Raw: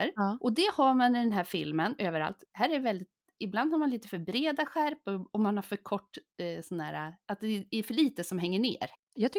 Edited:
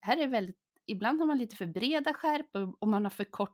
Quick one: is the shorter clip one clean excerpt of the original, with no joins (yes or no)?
yes